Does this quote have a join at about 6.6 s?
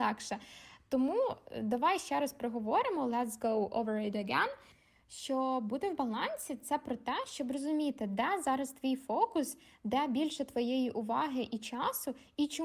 no; 0 cuts

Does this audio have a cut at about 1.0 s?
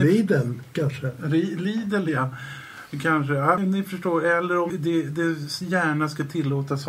no; 2 cuts; at 3.6 s, 4.7 s

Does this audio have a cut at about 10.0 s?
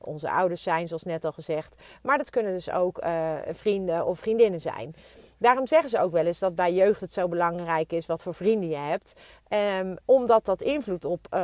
no; 0 cuts

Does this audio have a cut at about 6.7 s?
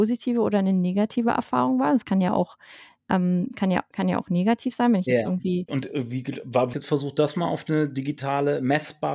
yes; 2 cuts; at 5.7 s, 6.7 s

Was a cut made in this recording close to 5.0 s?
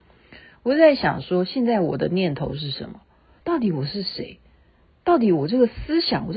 no; 1 cut; at 3.4 s

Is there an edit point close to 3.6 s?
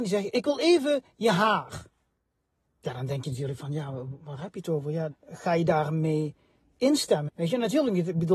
no; 2 cuts; at 5.1 s, 7.3 s

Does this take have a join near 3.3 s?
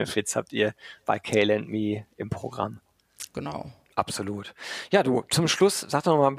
yes; 1 cut; at 3.3 s

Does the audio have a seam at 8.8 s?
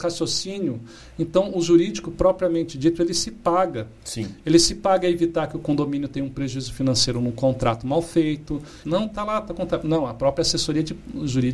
yes; 1 cut; at 8.8 s

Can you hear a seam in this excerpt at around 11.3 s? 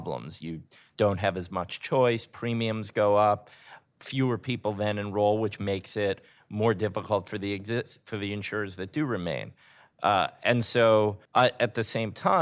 yes; 1 cut; at 11.3 s

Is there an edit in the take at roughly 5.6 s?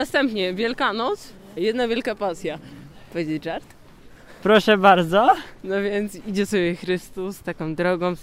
no; 1 cut; at 1.6 s

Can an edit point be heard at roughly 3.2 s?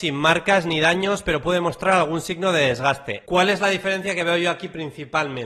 yes; 1 cut; at 3.2 s

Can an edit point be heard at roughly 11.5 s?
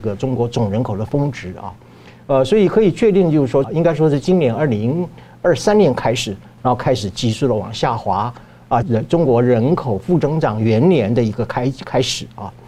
no; 3 cuts; at 3.6 s, 6.6 s, 8.8 s

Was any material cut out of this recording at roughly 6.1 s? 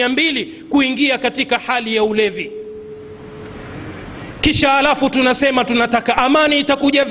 yes; 1 cut; at 6.1 s

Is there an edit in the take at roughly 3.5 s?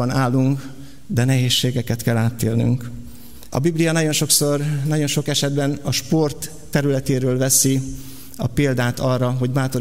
yes; 1 cut; at 3.5 s

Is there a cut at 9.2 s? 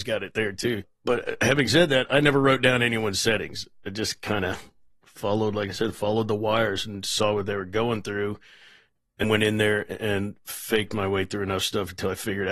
yes; 1 cut; at 9.2 s

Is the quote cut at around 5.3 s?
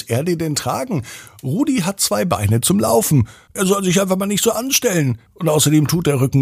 yes; 2 cuts; at 3.5 s, 5.3 s

